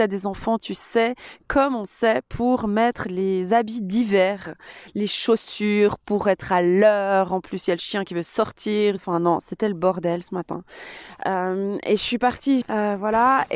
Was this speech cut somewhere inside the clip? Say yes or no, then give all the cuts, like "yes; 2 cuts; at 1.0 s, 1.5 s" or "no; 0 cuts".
yes; 2 cuts; at 9.0 s, 12.6 s